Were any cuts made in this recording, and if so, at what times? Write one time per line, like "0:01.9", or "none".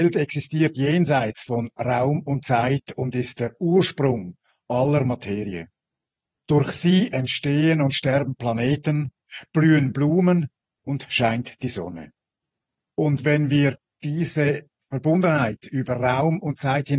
0:12.9